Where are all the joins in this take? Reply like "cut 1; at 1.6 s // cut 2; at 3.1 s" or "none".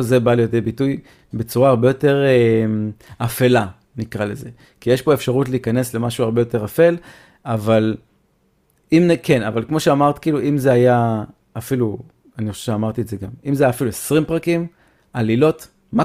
none